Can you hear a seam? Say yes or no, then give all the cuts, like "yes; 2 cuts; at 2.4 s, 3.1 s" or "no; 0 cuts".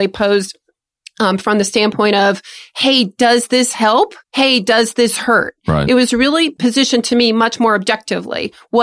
yes; 1 cut; at 4.2 s